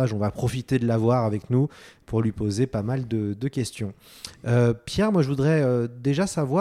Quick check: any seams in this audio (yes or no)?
no